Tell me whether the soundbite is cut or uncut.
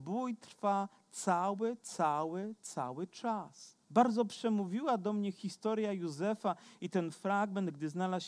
cut